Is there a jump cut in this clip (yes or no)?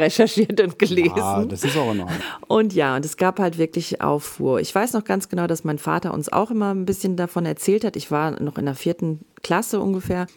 yes